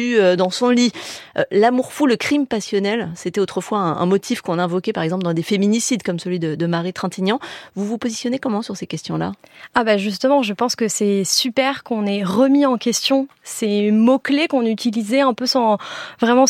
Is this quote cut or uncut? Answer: uncut